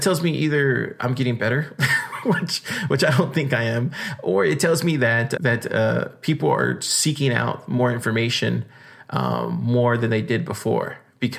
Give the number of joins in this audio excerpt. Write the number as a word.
one